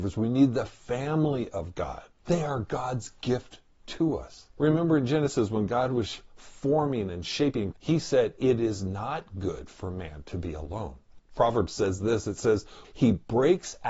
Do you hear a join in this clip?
yes; 3 cuts; at 7.7 s, 11.2 s, 12.8 s

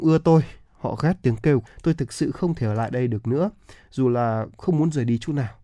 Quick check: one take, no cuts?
no; 1 cut; at 1.7 s

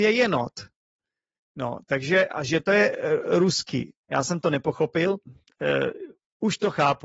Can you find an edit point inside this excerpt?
yes; 2 cuts; at 4.0 s, 5.3 s

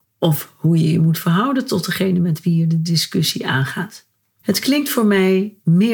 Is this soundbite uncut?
no; 1 cut; at 4.4 s

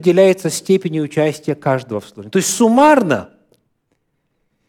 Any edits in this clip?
no; 0 cuts

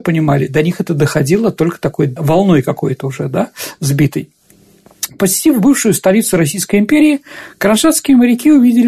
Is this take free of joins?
yes; 0 cuts

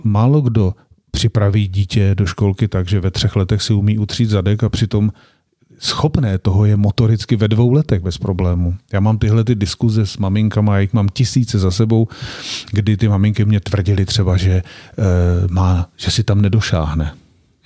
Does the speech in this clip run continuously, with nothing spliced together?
yes; 0 cuts

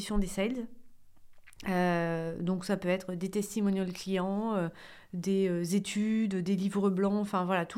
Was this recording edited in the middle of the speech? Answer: no; 0 cuts

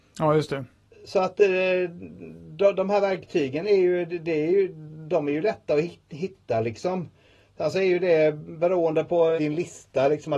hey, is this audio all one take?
no; 1 cut; at 9.4 s

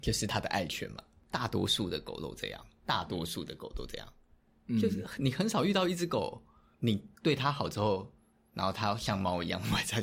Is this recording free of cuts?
no; 1 cut; at 1.2 s

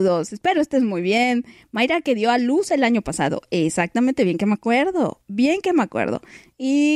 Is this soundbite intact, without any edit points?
yes; 0 cuts

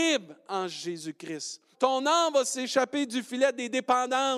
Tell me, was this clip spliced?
yes; 1 cut; at 1.7 s

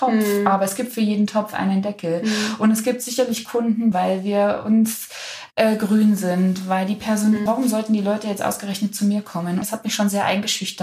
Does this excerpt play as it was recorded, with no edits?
no; 3 cuts; at 3.9 s, 7.5 s, 9.6 s

